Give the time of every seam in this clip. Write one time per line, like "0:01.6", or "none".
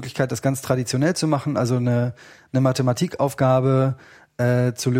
none